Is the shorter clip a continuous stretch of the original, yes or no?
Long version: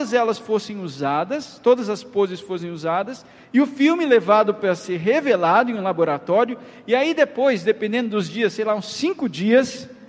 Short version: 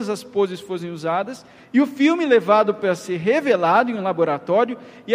yes